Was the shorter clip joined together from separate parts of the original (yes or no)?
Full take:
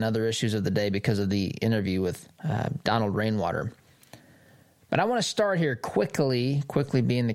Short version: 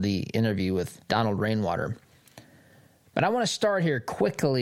yes